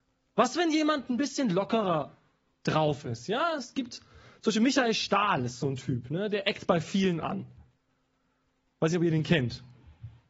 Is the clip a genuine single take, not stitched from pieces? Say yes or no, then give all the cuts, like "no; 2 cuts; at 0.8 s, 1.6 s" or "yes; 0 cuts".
yes; 0 cuts